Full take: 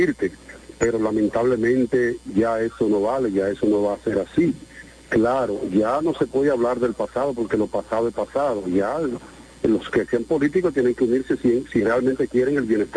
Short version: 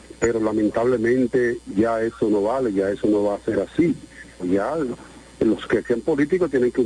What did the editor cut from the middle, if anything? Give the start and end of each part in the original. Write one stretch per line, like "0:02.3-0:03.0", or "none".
0:05.0-0:08.6